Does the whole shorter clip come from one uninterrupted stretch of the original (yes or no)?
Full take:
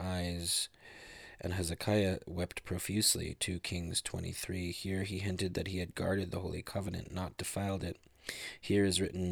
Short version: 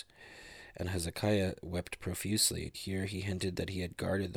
no